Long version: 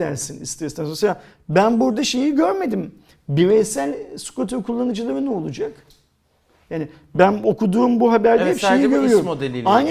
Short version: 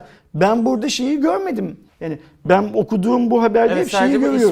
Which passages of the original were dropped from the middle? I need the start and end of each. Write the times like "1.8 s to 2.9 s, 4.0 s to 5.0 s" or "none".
3.0 s to 6.6 s